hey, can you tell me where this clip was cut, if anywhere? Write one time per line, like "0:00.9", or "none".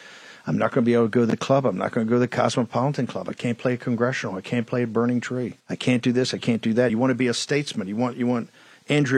0:05.6
0:06.9